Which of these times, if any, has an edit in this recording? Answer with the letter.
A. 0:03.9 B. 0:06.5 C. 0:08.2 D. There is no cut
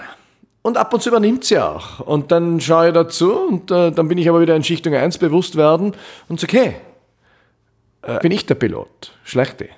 C